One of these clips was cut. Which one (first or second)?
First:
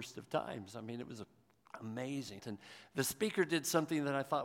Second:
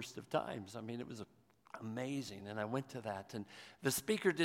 first